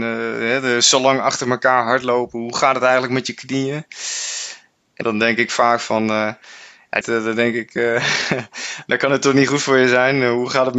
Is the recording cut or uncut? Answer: cut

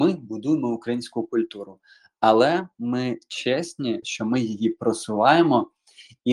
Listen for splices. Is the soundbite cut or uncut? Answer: cut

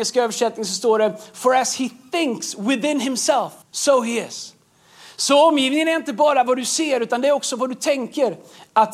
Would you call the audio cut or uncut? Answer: cut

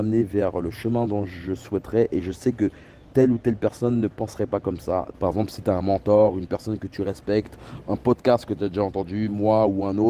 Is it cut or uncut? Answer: cut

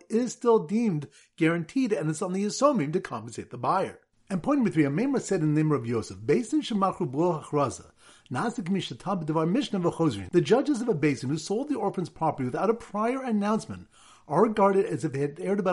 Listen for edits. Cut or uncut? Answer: uncut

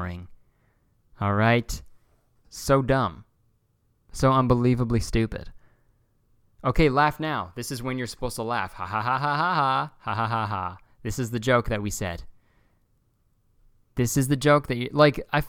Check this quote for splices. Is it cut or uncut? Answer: cut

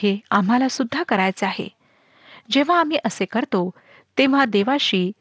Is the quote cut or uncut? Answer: uncut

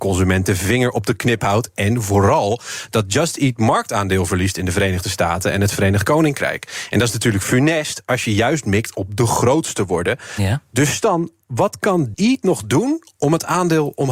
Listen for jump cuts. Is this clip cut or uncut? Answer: cut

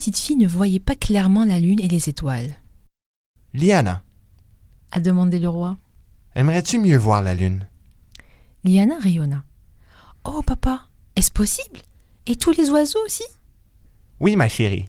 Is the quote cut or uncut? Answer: uncut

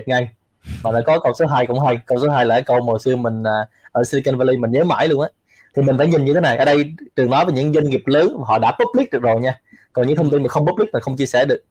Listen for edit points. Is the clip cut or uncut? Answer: cut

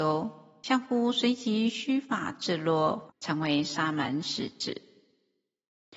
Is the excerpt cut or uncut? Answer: cut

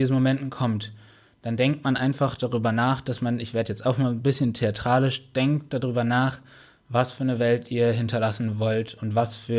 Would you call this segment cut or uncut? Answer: uncut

